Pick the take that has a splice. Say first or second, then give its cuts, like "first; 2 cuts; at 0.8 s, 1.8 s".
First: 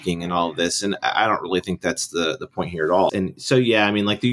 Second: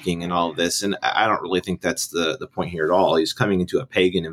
first; 1 cut; at 3.1 s